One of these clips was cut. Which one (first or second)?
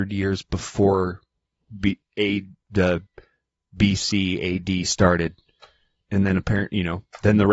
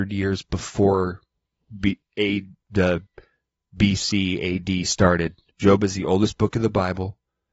second